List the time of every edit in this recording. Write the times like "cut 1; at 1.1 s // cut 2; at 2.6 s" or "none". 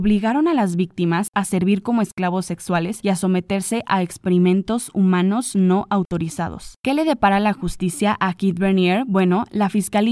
none